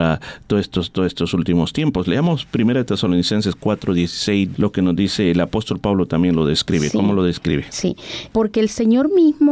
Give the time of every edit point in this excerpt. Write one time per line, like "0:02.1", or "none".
0:04.5
0:08.3